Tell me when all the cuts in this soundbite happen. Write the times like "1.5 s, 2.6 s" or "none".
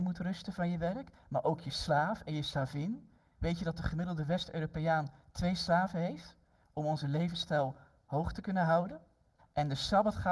9.4 s